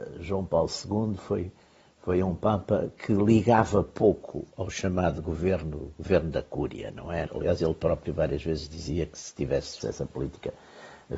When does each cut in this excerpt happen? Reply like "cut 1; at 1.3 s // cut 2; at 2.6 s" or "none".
cut 1; at 7.3 s // cut 2; at 9.8 s